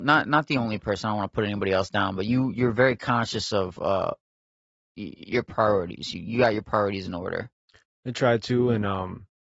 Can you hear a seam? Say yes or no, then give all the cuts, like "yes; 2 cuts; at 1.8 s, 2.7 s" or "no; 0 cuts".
no; 0 cuts